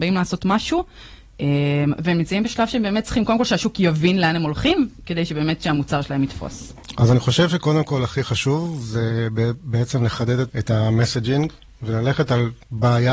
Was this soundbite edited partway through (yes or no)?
yes